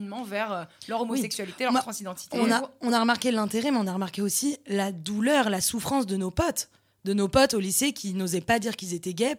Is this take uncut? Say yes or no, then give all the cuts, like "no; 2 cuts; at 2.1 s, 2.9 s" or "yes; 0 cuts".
yes; 0 cuts